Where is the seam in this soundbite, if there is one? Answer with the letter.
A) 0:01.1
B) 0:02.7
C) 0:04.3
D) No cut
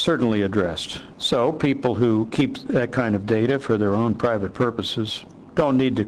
A